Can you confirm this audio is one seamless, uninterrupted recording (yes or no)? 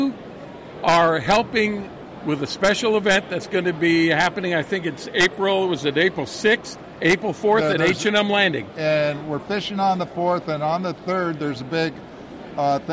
no